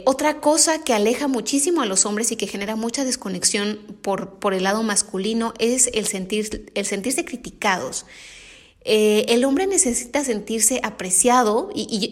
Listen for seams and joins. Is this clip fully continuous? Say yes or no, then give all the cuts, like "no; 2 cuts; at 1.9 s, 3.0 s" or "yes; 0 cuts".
yes; 0 cuts